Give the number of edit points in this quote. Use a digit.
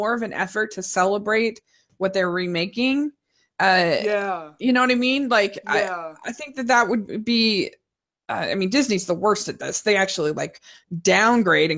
0